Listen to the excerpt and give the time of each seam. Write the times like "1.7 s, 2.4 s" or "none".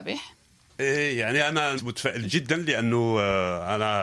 1.8 s